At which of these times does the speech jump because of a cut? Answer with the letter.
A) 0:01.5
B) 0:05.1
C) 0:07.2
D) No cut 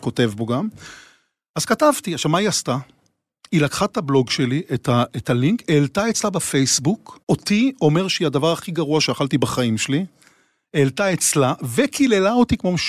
C